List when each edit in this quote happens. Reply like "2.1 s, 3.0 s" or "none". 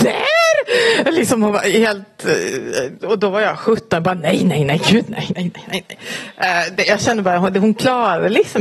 none